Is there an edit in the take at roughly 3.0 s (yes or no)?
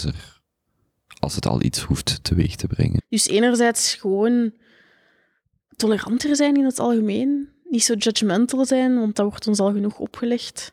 yes